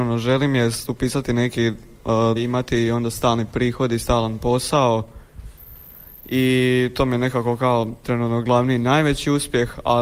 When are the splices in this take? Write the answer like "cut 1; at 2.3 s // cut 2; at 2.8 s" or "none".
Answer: cut 1; at 2.4 s